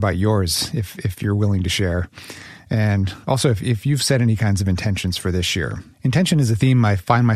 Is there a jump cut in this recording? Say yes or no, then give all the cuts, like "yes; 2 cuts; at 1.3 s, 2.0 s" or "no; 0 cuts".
yes; 1 cut; at 5.9 s